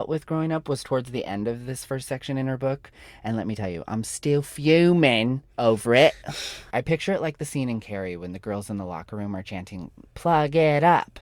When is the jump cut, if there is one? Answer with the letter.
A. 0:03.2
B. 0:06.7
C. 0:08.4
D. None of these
B